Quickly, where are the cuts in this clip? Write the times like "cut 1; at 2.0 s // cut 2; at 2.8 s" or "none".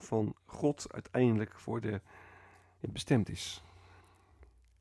cut 1; at 2.8 s

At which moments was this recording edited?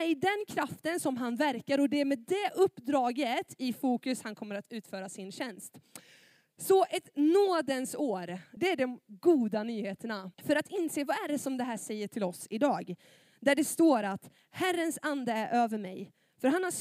cut 1; at 8.6 s // cut 2; at 10.3 s

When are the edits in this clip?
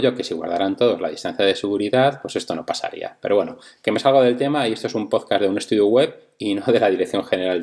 none

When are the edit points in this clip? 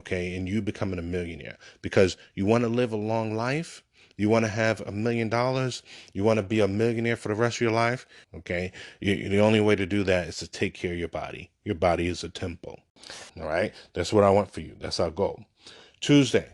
cut 1; at 8.2 s // cut 2; at 13.3 s

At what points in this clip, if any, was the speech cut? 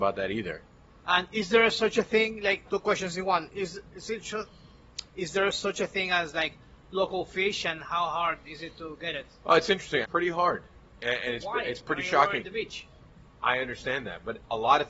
cut 1; at 2.7 s // cut 2; at 10.0 s

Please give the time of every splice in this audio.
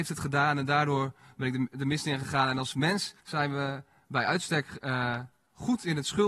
cut 1; at 3.2 s

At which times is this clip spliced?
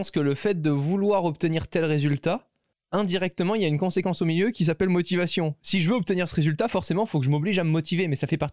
none

